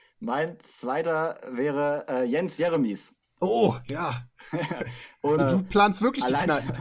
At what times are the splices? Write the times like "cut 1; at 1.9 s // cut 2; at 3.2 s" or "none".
cut 1; at 5.4 s